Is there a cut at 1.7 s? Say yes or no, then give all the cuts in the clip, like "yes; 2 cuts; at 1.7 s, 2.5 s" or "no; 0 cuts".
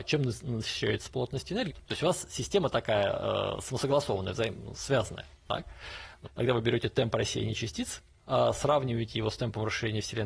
yes; 2 cuts; at 1.7 s, 6.2 s